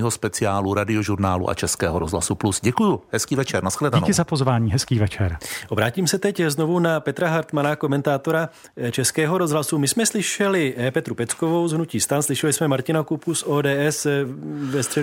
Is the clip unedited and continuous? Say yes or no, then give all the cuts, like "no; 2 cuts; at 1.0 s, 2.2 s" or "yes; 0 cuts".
yes; 0 cuts